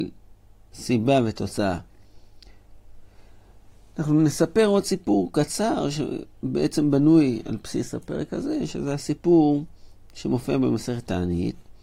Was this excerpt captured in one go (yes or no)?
yes